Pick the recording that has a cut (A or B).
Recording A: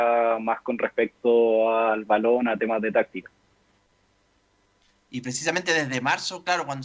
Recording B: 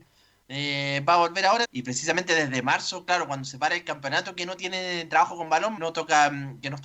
B